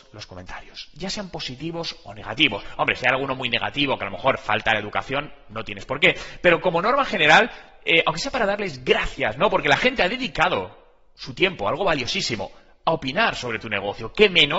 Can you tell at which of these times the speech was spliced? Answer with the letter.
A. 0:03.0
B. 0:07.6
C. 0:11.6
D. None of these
D